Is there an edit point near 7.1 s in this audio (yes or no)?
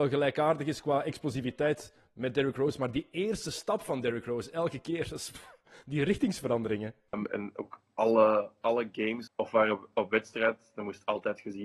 yes